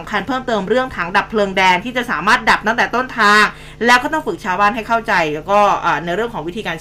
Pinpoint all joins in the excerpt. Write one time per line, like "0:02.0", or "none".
none